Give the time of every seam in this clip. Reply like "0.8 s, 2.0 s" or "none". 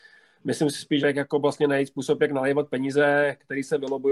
1.0 s